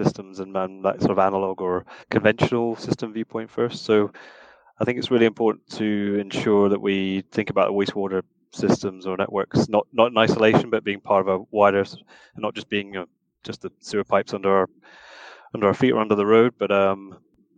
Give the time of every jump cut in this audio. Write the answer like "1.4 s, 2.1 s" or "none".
2.0 s

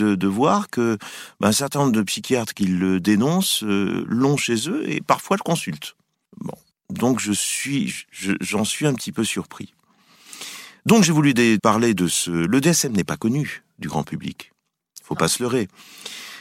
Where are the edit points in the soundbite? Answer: 8.7 s, 11.6 s

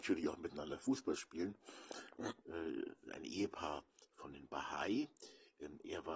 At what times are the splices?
2.4 s

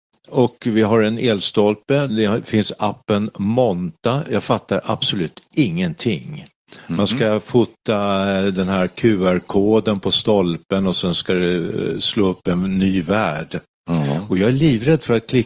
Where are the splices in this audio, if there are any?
2.1 s

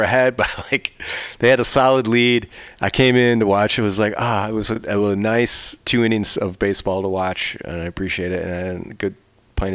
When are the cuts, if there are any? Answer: none

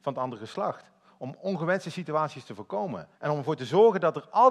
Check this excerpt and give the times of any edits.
3.1 s

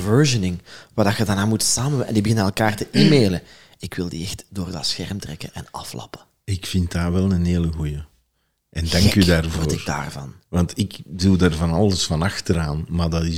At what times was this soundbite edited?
none

